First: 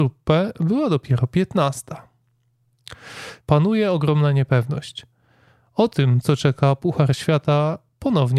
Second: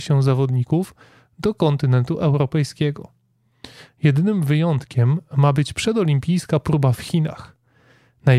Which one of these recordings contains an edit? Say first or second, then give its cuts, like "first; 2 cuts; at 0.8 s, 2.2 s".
first; 1 cut; at 3.4 s